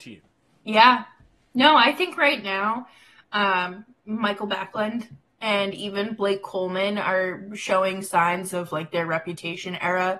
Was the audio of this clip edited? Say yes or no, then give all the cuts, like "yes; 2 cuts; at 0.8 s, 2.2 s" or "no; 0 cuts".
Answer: no; 0 cuts